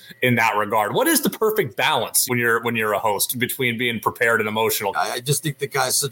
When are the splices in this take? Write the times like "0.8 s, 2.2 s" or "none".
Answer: 2.3 s, 4.9 s